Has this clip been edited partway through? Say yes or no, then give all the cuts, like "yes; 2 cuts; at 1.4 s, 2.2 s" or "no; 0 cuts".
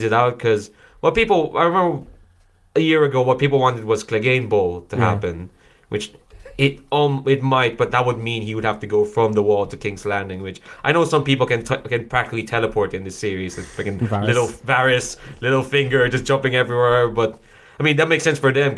no; 0 cuts